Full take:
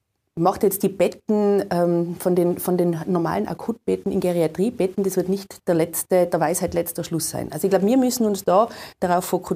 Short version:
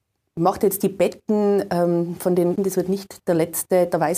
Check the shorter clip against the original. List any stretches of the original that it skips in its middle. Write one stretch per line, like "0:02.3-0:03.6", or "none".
0:02.6-0:05.0